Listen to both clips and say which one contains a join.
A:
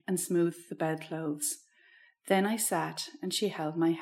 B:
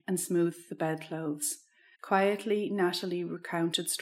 B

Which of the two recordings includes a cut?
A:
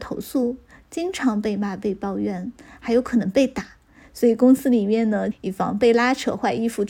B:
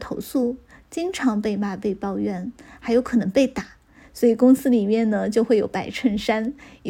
A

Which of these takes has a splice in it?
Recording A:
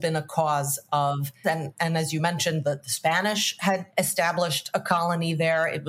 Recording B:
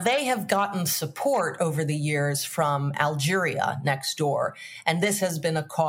A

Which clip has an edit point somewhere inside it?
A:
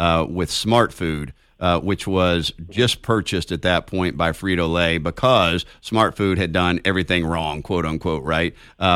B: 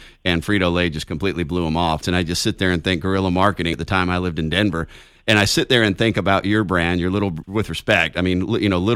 B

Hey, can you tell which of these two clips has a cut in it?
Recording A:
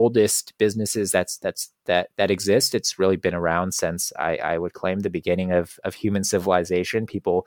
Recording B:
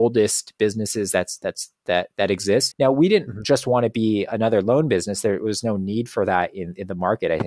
B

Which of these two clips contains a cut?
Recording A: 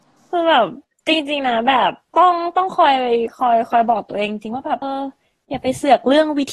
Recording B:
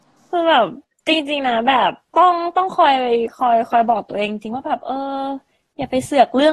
A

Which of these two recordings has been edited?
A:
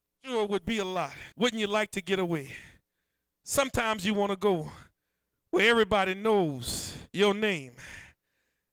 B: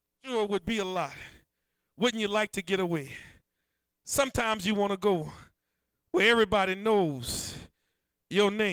A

